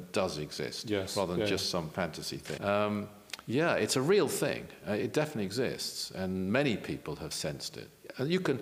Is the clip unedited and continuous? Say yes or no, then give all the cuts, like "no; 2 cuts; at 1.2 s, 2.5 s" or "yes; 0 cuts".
no; 1 cut; at 2.6 s